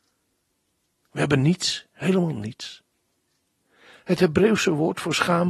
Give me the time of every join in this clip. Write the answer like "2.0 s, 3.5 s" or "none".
1.0 s